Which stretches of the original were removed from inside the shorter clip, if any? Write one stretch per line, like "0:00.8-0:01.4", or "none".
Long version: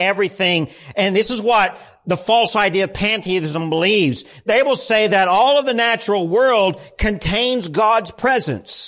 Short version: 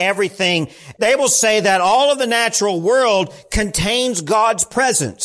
0:00.9-0:04.4